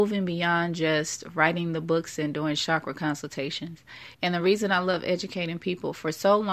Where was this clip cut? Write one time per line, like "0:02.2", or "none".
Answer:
0:04.1